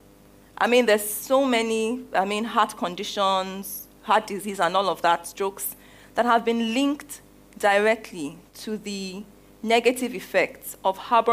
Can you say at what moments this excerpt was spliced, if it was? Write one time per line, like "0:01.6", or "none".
none